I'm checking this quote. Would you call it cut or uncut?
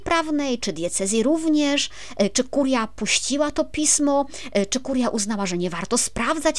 cut